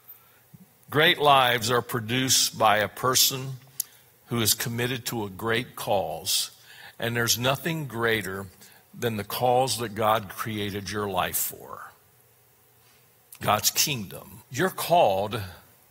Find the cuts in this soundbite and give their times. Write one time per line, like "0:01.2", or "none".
0:14.4